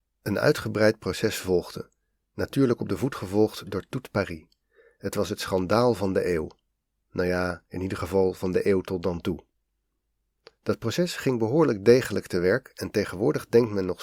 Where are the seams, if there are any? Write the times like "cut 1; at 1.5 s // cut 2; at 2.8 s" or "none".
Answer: none